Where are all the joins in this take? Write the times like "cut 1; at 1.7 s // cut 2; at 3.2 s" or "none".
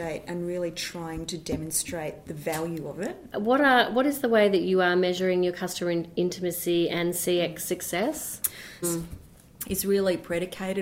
cut 1; at 3.3 s // cut 2; at 8.8 s